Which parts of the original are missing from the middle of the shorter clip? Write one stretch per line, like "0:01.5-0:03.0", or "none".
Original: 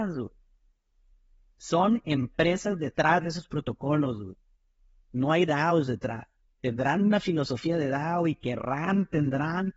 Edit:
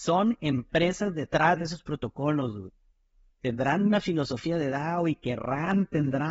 0:04.9-0:06.5